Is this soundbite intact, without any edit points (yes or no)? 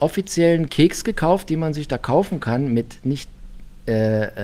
yes